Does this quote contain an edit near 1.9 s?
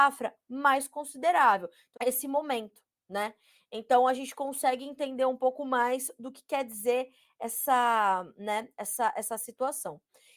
yes; 1 cut; at 1.9 s

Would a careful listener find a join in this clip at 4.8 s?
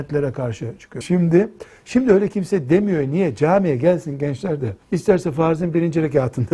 yes; 2 cuts; at 1.0 s, 4.8 s

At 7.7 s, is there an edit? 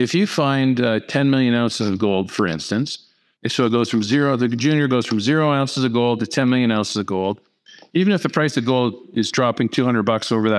no; 0 cuts

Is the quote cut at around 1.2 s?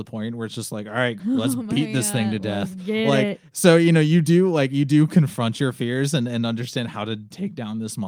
yes; 1 cut; at 1.2 s

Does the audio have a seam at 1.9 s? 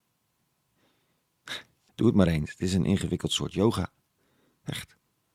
yes; 1 cut; at 1.9 s

